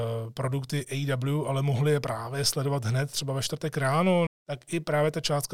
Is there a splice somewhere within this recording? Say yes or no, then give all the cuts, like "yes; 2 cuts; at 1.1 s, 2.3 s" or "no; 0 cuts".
yes; 1 cut; at 4.3 s